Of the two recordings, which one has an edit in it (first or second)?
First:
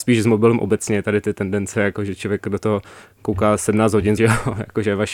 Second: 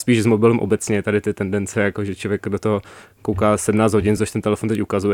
first